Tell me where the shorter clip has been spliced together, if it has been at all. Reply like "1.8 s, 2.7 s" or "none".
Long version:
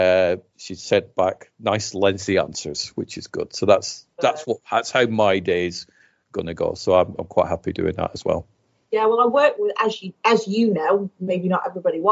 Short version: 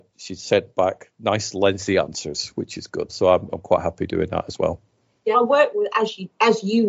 3.1 s, 5.3 s